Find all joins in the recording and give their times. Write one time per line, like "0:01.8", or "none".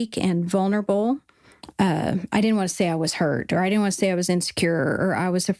0:01.7